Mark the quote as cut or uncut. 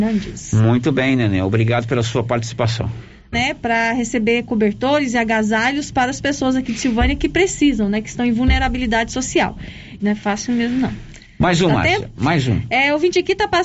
cut